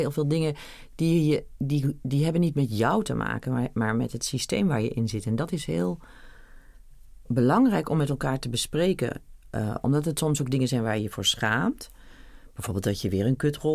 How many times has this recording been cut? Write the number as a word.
one